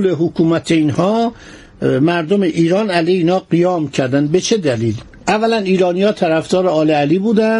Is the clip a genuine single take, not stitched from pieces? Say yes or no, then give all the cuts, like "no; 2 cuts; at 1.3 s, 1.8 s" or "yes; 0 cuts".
yes; 0 cuts